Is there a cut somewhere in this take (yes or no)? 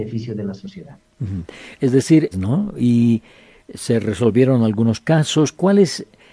yes